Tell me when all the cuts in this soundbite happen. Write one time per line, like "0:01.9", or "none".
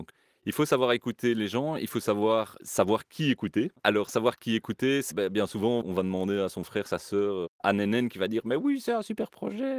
0:03.8
0:05.1